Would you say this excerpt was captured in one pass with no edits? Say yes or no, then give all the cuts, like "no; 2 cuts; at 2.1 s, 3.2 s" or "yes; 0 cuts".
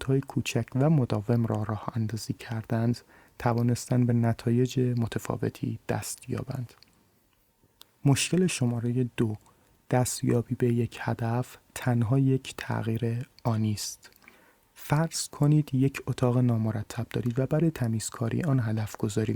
yes; 0 cuts